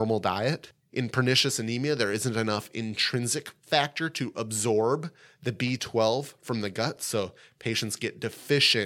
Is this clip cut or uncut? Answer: uncut